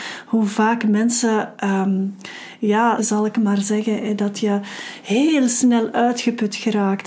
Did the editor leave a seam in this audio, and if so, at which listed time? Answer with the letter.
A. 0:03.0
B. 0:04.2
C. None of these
A